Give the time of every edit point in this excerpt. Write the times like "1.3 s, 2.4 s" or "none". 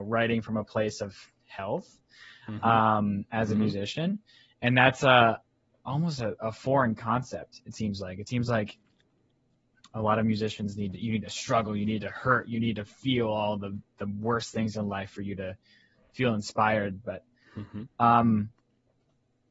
17.9 s